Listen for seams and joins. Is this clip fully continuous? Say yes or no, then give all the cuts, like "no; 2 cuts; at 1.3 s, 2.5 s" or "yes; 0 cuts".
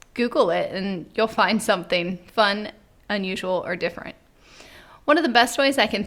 yes; 0 cuts